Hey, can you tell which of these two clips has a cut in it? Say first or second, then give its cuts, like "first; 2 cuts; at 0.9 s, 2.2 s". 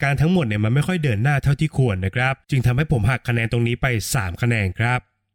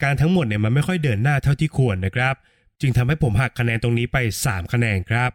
first; 1 cut; at 2.4 s